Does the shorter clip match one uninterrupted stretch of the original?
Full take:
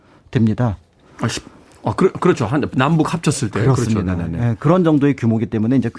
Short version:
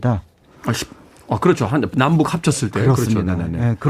no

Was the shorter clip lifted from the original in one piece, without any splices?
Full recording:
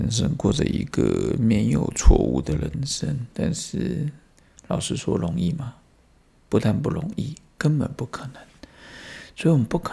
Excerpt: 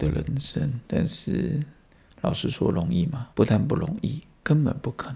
no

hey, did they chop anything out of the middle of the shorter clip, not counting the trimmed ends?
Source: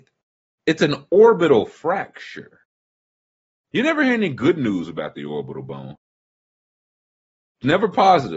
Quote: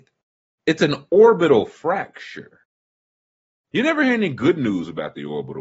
no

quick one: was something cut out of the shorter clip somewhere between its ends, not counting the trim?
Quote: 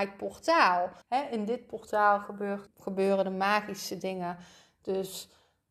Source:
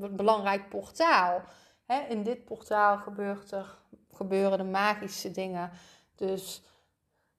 yes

